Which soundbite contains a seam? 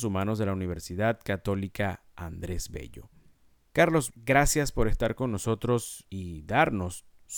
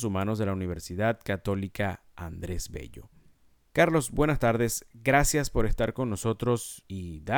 first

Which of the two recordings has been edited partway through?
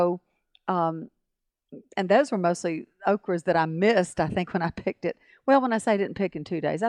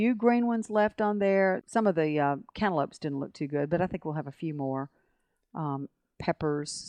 second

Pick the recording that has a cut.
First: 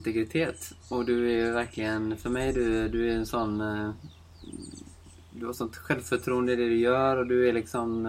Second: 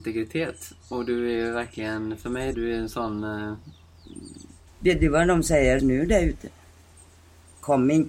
second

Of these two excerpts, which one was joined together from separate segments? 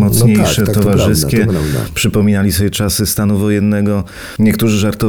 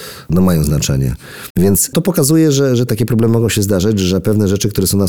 second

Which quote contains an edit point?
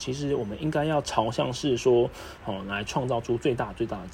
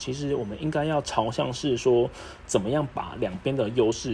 first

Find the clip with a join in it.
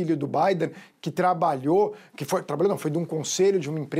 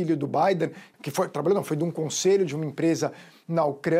second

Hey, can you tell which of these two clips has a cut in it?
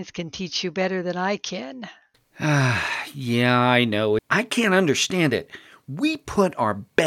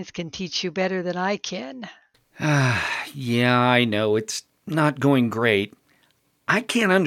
first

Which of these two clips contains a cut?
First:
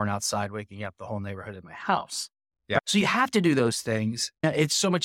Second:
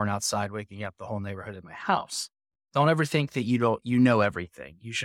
second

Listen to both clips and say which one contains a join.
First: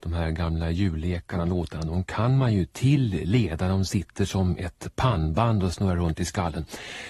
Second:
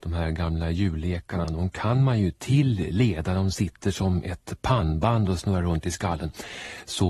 second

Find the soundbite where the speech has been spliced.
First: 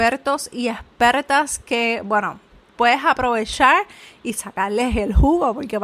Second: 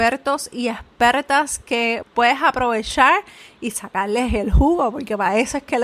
second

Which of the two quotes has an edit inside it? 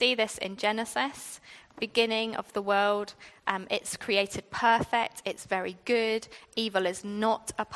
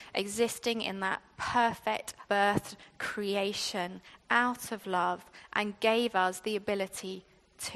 second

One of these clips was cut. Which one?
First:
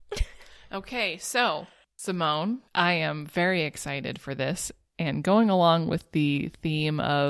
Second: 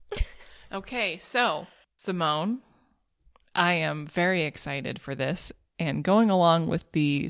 first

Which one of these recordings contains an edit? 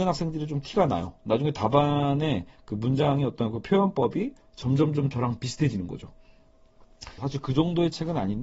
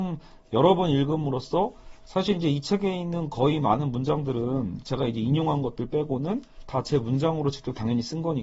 first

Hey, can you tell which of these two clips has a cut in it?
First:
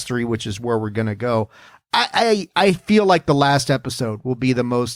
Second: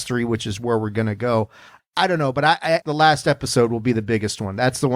second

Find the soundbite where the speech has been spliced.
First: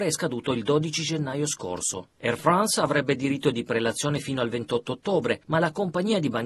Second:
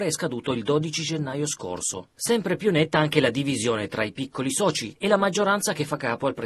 second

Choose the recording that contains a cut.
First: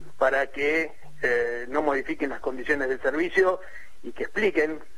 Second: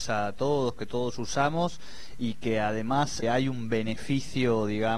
second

